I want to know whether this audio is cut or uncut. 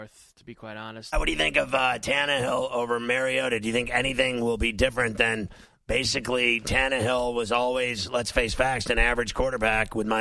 cut